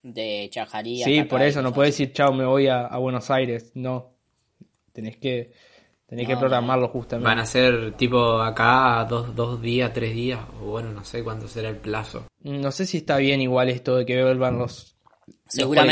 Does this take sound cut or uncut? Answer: uncut